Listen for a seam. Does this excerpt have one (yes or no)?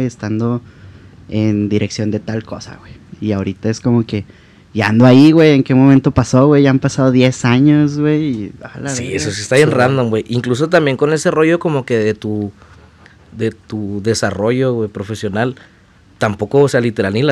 no